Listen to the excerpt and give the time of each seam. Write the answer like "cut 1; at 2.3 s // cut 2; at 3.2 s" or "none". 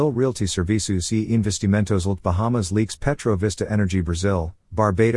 cut 1; at 2.2 s